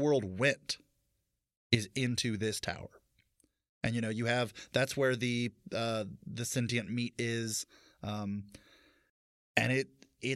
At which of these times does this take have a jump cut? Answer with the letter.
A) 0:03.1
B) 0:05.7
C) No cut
C